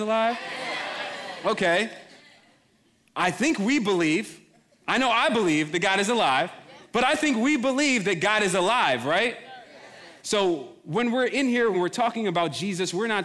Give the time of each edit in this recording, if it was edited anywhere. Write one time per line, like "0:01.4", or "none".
0:06.8
0:10.2
0:11.7